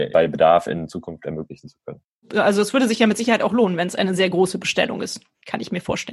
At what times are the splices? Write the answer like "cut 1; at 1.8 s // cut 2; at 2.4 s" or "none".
none